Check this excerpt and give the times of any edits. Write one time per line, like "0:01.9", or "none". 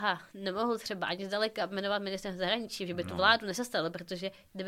none

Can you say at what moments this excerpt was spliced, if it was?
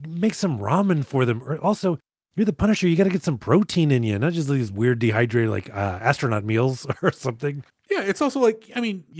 none

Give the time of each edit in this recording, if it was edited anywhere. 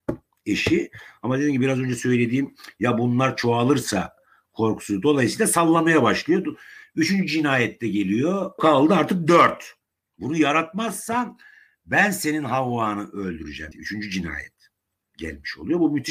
0:08.6
0:10.1
0:13.7

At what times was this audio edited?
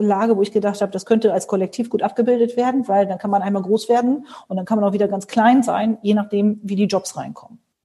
none

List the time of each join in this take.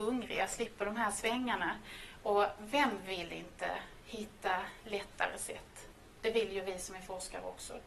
0:02.6

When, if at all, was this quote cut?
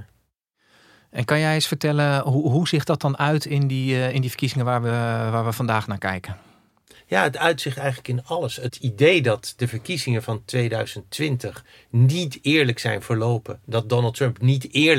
none

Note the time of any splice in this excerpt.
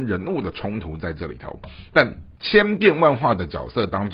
0:02.4

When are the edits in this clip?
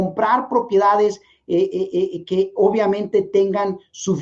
none

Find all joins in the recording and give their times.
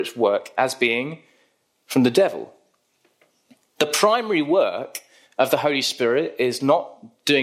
none

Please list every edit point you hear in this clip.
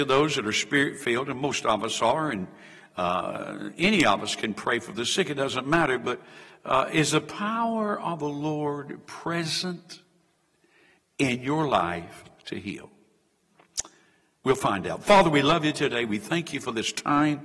none

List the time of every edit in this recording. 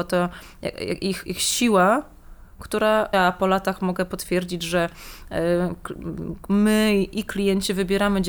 0:01.2
0:03.1

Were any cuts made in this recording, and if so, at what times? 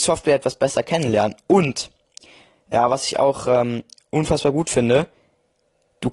none

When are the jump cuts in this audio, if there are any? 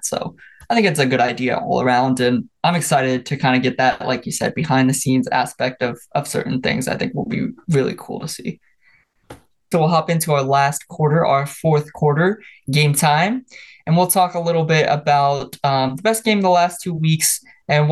0:09.7

